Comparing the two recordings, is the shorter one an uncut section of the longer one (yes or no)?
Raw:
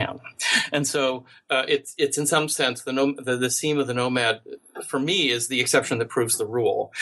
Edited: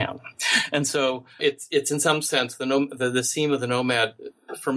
no